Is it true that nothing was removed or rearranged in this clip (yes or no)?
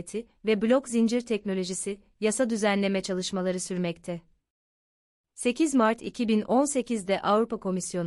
yes